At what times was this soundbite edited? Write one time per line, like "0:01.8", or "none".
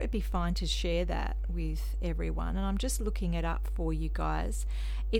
none